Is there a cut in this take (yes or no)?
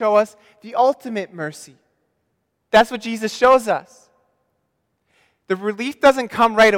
yes